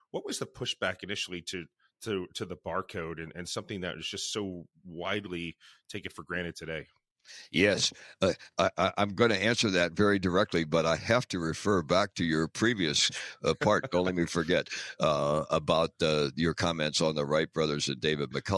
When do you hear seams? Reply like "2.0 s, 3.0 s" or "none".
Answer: none